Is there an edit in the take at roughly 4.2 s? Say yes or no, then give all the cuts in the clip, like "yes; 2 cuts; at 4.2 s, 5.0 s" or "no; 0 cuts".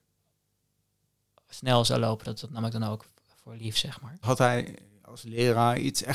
yes; 1 cut; at 4.2 s